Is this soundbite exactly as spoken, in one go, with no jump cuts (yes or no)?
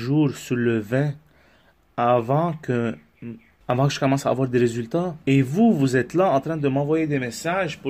no